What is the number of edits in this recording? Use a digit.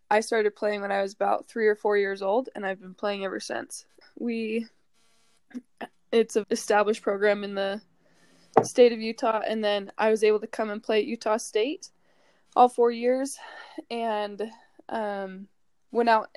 2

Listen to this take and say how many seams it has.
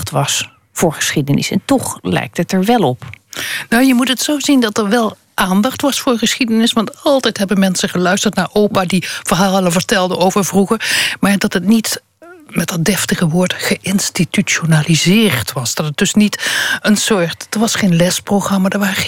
0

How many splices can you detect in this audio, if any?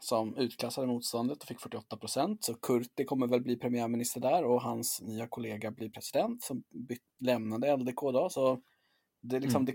0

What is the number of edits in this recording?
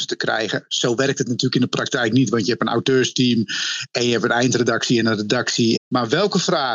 1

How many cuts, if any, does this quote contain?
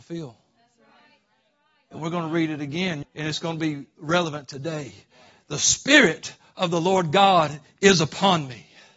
1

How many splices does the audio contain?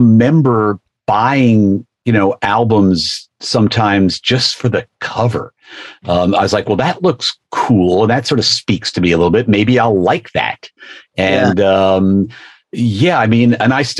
0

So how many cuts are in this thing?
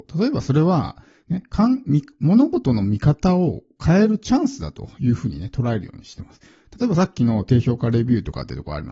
0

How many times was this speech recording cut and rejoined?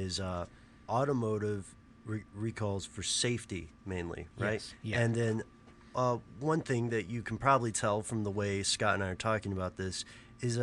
0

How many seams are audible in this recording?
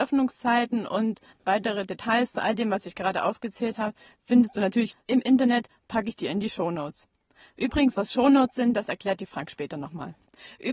0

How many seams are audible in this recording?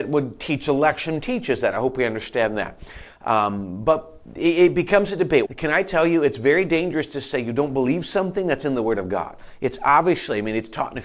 1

